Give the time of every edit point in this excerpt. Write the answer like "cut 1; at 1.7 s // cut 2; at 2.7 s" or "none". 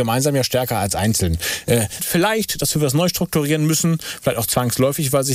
cut 1; at 2.0 s